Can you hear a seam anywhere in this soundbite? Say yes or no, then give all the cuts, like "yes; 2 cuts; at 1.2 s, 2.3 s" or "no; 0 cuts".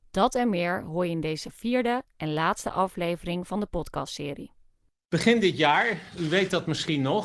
no; 0 cuts